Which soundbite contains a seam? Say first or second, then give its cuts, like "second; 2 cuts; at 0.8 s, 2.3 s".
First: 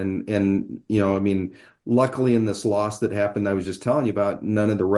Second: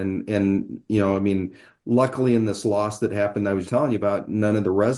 second; 1 cut; at 3.6 s